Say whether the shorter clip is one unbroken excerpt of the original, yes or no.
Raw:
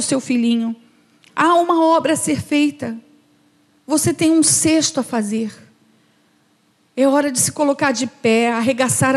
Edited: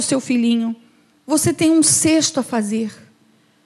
no